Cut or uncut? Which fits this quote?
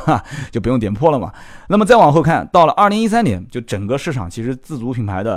uncut